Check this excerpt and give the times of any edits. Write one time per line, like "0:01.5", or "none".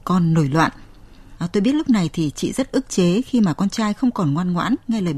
0:01.4